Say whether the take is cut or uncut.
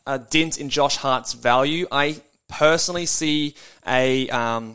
uncut